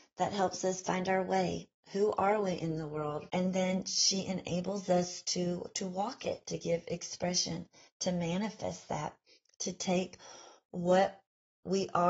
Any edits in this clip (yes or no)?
yes